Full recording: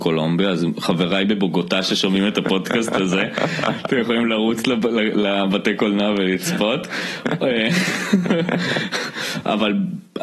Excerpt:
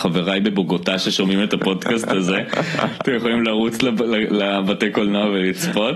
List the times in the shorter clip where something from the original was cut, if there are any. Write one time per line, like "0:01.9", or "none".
none